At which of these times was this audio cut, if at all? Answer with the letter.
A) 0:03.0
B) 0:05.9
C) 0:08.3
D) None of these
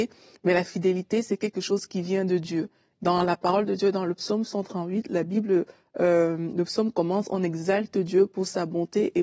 A